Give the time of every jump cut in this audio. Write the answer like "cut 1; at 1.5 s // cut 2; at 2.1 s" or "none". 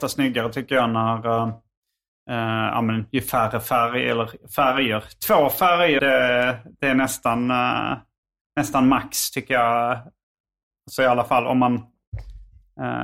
cut 1; at 6.0 s